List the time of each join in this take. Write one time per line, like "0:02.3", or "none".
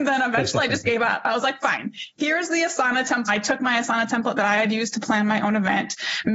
0:03.3